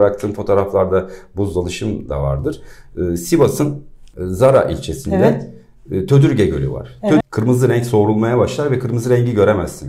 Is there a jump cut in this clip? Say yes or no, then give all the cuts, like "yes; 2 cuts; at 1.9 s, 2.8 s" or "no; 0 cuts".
yes; 1 cut; at 7.2 s